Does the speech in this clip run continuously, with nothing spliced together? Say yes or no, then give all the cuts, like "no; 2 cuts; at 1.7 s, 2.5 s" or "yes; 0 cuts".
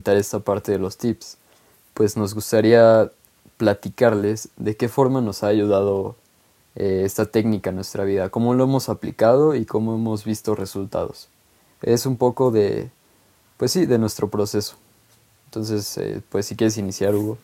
yes; 0 cuts